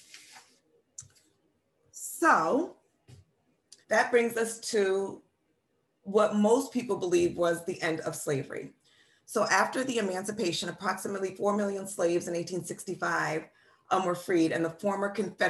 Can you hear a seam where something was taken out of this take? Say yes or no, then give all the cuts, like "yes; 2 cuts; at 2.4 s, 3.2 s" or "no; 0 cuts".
yes; 1 cut; at 3.8 s